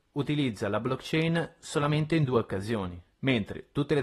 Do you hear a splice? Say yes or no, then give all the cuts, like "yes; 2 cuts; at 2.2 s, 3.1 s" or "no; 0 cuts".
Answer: yes; 1 cut; at 3.1 s